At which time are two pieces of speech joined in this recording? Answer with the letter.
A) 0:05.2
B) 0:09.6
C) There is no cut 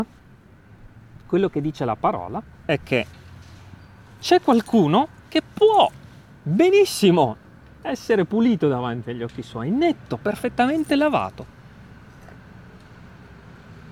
A